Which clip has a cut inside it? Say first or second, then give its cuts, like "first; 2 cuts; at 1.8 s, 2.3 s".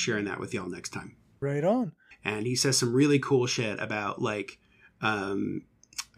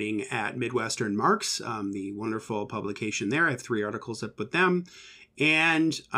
first; 1 cut; at 2.1 s